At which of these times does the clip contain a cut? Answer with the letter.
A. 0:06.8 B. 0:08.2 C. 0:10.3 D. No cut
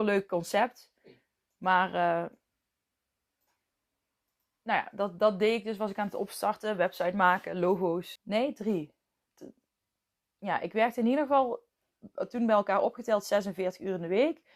B